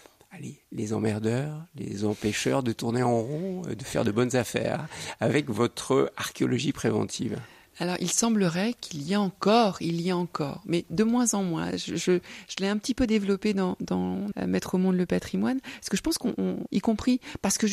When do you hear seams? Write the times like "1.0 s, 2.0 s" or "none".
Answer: 14.3 s, 16.7 s